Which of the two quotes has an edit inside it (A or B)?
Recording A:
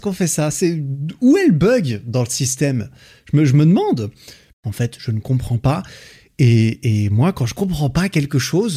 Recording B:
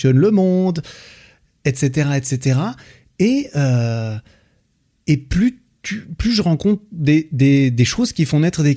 A